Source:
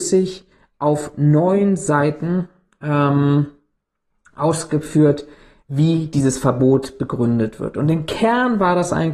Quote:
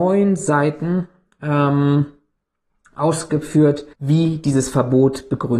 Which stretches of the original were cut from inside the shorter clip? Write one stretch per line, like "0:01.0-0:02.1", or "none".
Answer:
0:05.3-0:05.6

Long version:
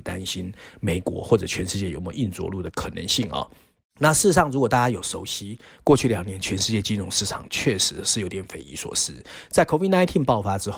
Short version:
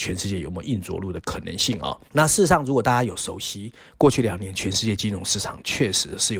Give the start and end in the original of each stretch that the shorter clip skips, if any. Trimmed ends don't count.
0:03.6-0:03.9

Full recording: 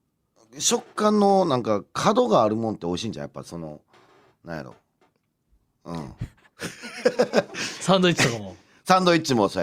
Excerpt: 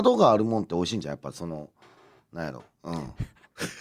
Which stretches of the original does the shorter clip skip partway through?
0:04.8-0:05.7

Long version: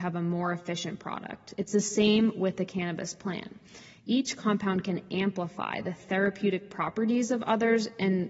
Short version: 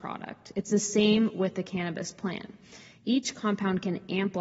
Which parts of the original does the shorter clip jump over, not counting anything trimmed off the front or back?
none

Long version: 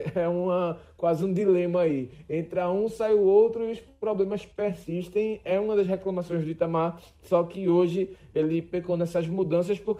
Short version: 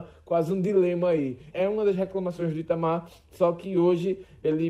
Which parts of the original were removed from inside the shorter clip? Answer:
0:02.2-0:05.4

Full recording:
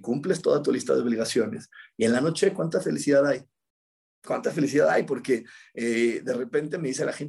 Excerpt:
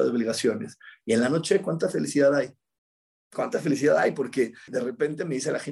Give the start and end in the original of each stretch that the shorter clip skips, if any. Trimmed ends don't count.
0:05.6-0:06.2

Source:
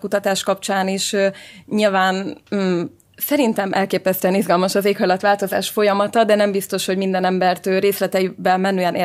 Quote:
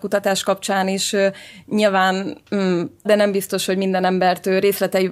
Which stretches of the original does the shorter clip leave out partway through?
0:03.1-0:06.3

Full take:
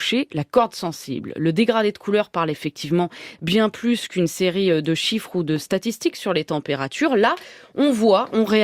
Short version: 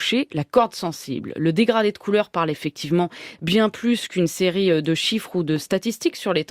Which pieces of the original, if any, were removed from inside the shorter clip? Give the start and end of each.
none

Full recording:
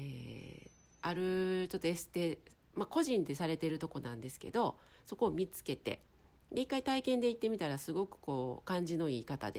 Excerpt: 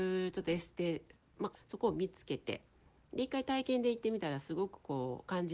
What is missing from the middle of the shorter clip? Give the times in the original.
0:02.9-0:04.9

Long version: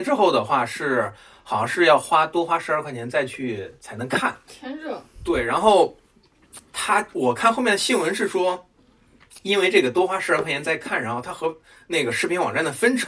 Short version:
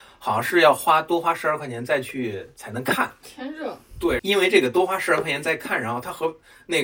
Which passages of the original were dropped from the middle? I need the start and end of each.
0:05.4-0:09.4

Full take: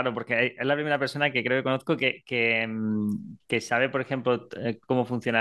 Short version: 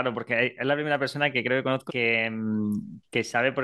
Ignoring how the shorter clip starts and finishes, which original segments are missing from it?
0:01.9-0:02.2

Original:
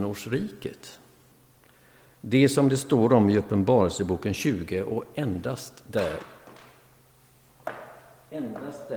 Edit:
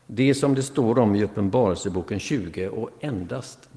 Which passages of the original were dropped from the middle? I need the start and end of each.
none

